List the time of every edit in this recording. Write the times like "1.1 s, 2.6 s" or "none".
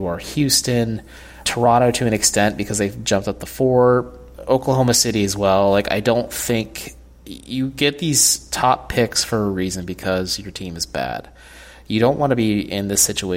1.4 s